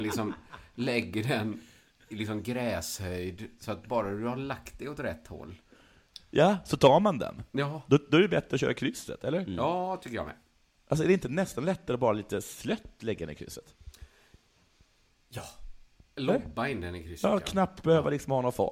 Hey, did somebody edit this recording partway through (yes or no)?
no